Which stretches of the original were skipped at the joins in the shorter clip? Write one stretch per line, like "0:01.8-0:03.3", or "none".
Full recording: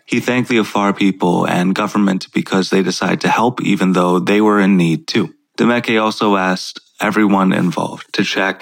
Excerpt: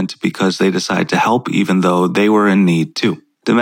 none